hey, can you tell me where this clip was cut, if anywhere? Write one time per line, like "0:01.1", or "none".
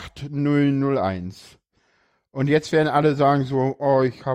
none